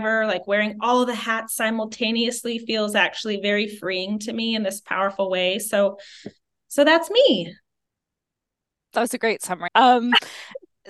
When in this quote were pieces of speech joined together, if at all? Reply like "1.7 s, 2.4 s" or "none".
9.7 s